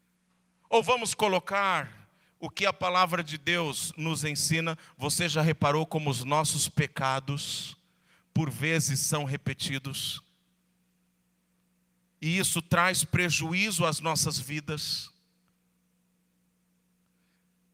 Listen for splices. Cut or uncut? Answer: uncut